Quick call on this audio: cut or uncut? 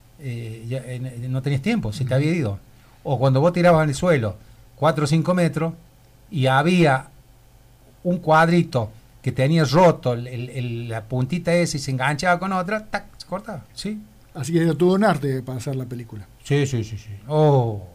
cut